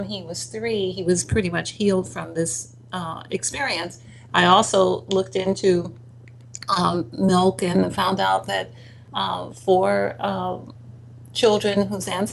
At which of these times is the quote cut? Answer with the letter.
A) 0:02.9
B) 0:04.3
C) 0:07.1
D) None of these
B